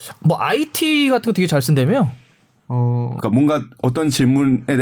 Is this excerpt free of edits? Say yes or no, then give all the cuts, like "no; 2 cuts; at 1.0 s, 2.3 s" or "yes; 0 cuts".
no; 1 cut; at 3.2 s